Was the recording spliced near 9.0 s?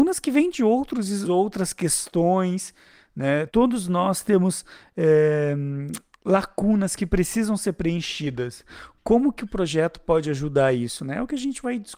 no; 2 cuts; at 1.2 s, 3.5 s

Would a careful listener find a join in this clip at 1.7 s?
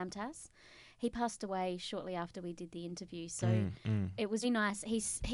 no; 1 cut; at 4.4 s

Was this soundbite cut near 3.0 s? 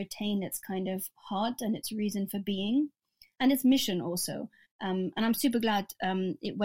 no; 1 cut; at 4.6 s

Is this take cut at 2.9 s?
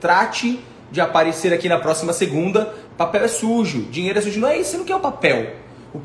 yes; 1 cut; at 2.9 s

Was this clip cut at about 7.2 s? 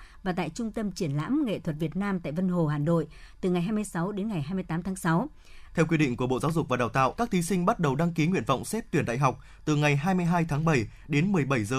yes; 2 cuts; at 5.7 s, 7.2 s

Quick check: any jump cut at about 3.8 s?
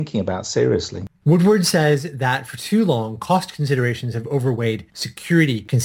no; 1 cut; at 1.2 s

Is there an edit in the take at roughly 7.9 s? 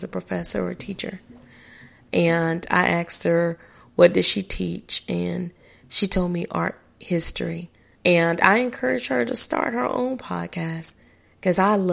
yes; 1 cut; at 7.9 s

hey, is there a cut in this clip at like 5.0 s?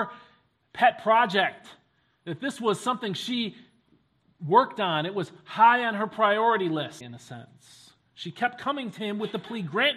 no; 1 cut; at 7.0 s

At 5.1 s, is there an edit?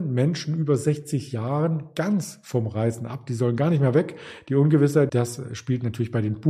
yes; 1 cut; at 5.1 s

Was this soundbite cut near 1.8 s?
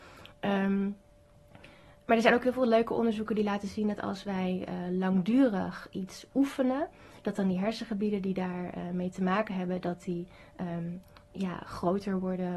no; 0 cuts

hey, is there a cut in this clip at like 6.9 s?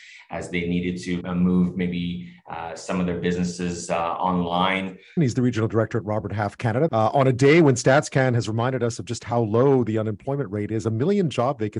yes; 3 cuts; at 1.2 s, 5.2 s, 6.9 s

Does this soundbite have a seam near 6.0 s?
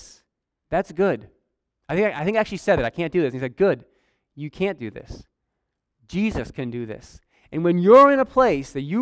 no; 0 cuts

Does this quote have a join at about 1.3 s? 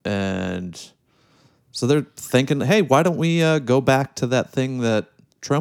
no; 0 cuts

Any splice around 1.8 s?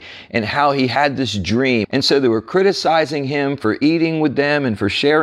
yes; 1 cut; at 1.8 s

